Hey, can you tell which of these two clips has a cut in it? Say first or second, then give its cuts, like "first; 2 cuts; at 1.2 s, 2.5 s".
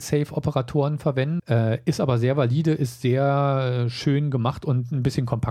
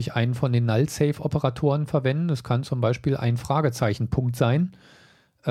first; 1 cut; at 1.4 s